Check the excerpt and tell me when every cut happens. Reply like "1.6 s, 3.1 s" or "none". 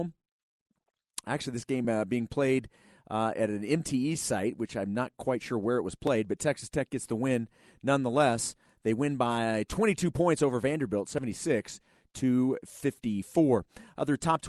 none